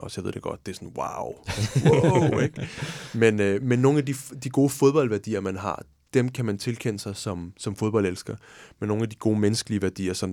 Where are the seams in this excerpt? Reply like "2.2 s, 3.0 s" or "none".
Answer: none